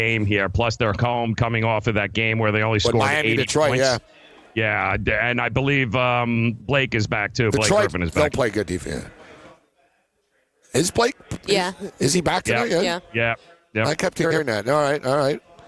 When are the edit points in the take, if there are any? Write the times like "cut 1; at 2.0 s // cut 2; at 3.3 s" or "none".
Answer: none